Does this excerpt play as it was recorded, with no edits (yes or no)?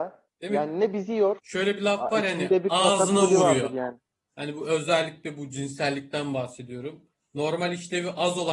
no